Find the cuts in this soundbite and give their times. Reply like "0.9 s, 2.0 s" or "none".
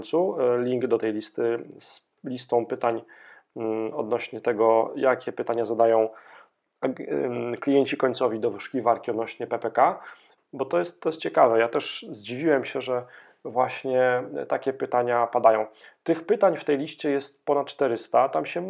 10.4 s